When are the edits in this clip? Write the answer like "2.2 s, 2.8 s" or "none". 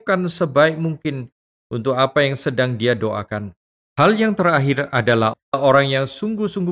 3.8 s